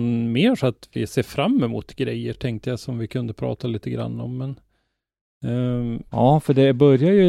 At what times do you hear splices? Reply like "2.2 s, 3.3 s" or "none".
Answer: none